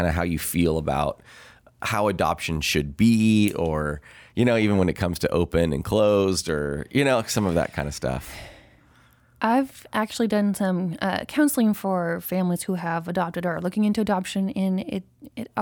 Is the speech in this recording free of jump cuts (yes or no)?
yes